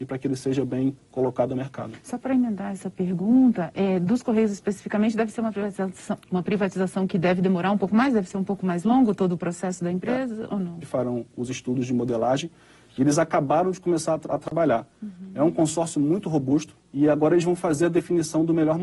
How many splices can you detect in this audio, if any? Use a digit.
2